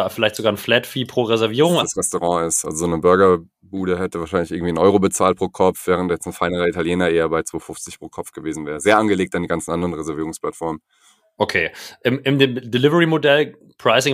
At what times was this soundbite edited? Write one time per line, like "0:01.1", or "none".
0:01.8

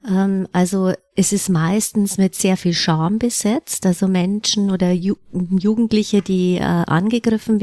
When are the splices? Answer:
none

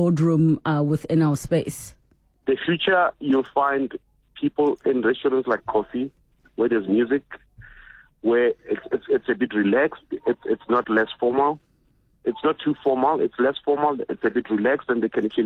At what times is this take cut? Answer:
0:02.4

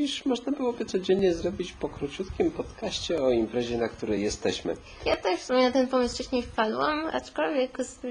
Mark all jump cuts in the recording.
none

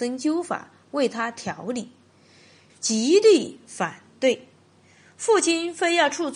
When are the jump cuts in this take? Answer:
0:02.7

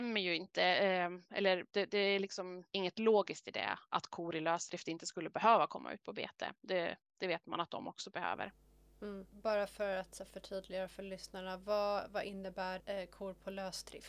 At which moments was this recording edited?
0:02.7

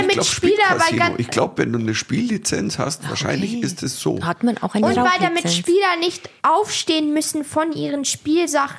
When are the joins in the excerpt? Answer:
0:06.4

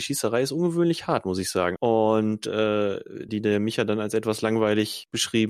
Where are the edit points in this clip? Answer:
0:01.8
0:03.3

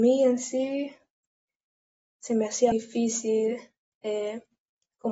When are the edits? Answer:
0:02.7

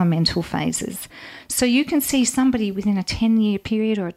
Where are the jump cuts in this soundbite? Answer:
none

